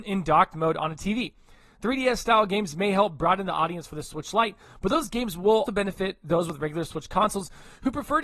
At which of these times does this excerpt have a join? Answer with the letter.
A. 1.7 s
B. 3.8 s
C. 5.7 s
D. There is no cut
C